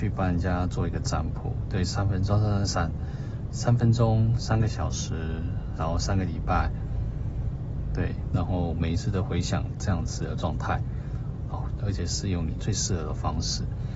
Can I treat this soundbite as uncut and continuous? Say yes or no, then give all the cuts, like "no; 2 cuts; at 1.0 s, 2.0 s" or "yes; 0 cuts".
no; 3 cuts; at 5.8 s, 8.3 s, 11.8 s